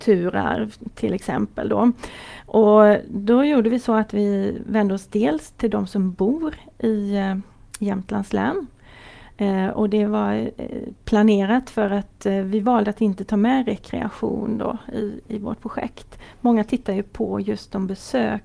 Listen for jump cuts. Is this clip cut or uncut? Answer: uncut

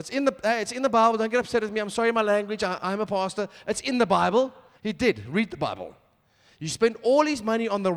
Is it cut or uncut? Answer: cut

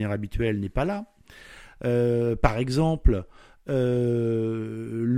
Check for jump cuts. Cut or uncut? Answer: uncut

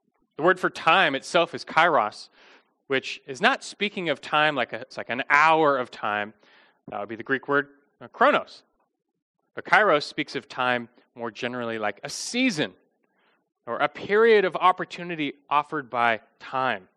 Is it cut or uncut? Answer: cut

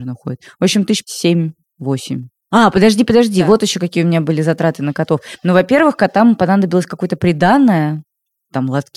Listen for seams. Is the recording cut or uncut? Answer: uncut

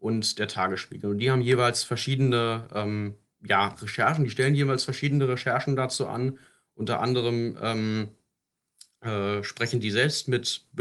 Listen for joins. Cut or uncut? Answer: uncut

